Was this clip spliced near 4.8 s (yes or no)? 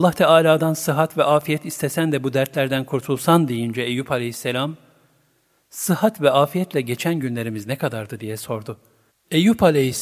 no